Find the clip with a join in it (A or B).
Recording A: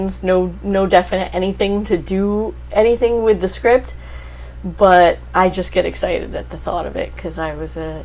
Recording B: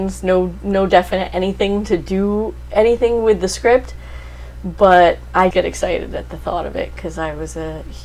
B